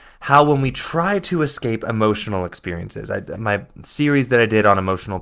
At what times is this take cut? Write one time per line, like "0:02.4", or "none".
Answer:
0:03.3